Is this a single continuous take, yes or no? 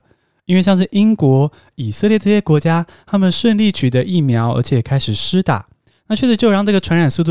yes